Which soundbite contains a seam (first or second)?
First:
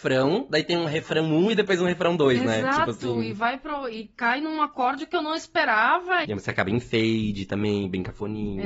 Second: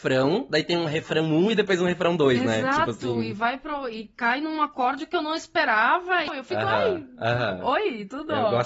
first